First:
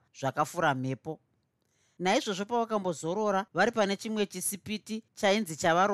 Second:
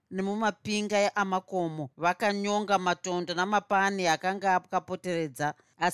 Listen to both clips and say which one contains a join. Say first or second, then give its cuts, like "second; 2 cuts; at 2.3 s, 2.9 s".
second; 1 cut; at 1.9 s